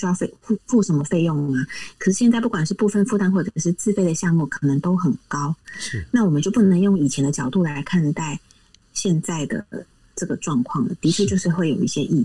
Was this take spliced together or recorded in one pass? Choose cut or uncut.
uncut